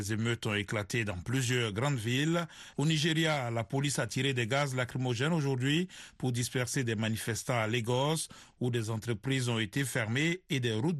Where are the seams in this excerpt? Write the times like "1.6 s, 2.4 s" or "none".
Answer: 2.7 s